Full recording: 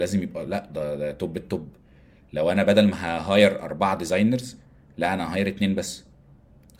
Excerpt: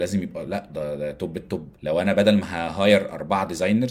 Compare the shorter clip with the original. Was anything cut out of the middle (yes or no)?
yes